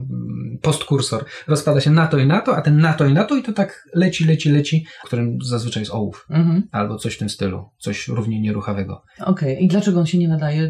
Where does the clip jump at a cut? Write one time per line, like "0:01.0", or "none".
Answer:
0:05.0